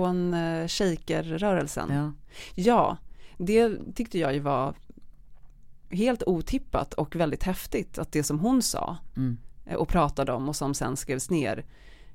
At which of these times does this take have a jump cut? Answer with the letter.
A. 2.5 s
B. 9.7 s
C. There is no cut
C